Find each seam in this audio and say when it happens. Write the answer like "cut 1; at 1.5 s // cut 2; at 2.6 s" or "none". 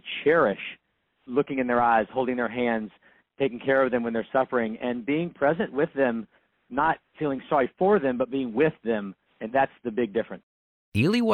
none